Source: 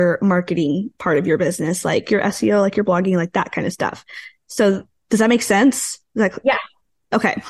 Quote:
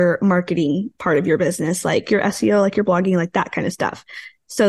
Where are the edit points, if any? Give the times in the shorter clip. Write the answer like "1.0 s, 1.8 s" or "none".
none